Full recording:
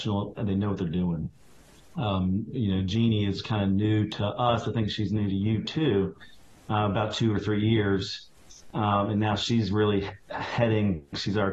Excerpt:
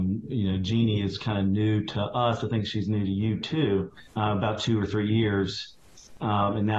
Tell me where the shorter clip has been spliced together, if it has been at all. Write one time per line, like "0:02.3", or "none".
0:04.1